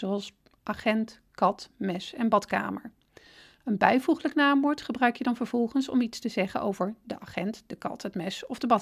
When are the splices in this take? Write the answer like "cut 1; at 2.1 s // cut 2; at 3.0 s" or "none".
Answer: none